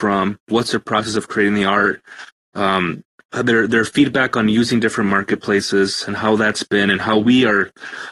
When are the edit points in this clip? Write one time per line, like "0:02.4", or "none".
none